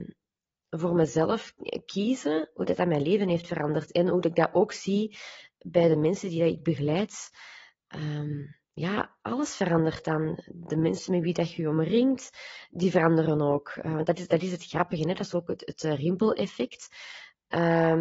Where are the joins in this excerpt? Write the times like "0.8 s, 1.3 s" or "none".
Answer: none